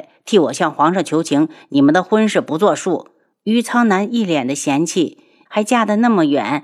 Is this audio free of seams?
no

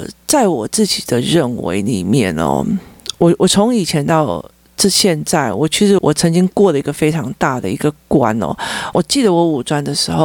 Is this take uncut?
no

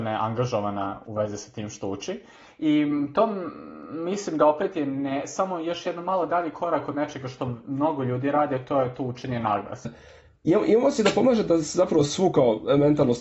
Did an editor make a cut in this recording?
yes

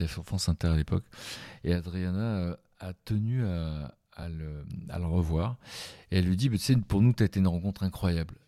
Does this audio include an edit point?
no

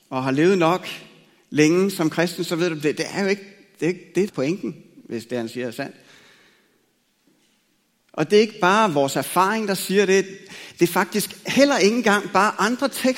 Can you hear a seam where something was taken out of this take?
yes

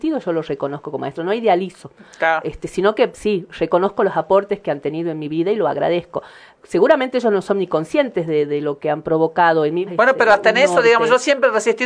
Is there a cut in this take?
yes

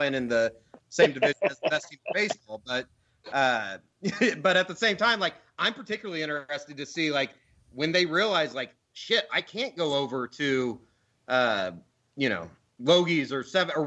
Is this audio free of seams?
yes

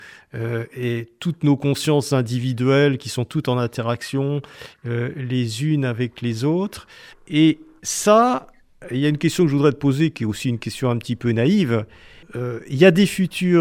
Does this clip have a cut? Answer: yes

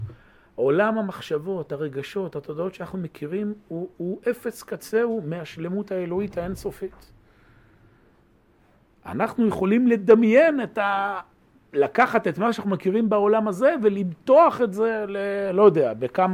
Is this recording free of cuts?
yes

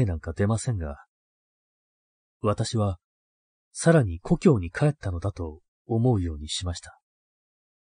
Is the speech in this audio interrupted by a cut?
yes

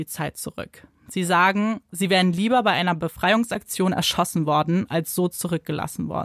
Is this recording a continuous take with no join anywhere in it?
yes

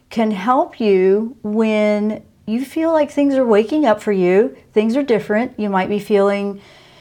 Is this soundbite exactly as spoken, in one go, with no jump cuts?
yes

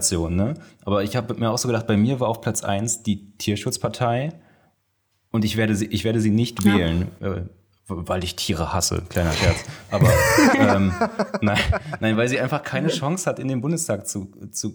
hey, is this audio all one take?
yes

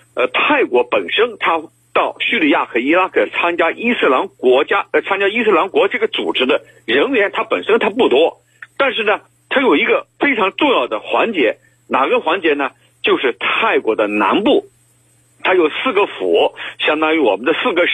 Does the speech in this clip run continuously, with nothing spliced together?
yes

